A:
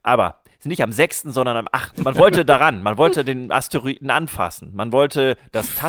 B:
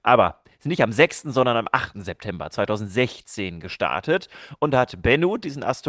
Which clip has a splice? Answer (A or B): A